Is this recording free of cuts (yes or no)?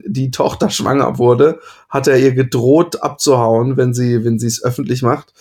yes